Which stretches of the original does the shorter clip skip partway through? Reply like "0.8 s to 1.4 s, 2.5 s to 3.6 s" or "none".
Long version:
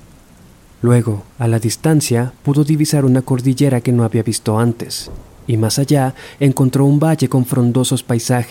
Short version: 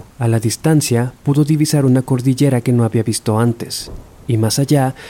none